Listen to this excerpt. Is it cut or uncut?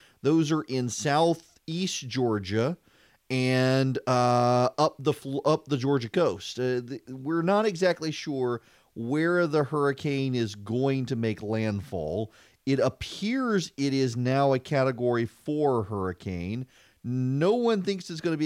uncut